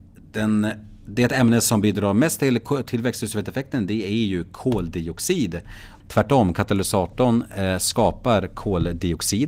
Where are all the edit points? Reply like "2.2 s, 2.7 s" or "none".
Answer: 6.0 s